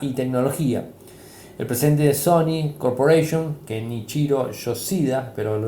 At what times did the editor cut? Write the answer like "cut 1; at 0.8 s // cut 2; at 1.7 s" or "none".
none